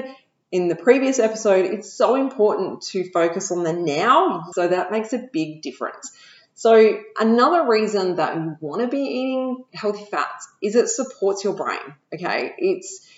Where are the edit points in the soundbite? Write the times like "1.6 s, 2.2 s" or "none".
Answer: 4.5 s